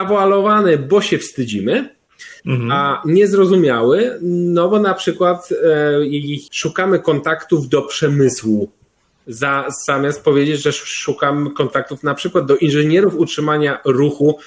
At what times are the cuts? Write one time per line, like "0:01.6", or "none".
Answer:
0:06.5